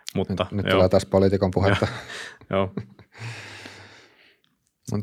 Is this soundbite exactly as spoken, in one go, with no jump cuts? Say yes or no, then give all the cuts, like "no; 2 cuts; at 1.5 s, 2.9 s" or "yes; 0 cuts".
yes; 0 cuts